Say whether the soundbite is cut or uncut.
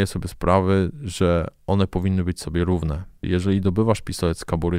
cut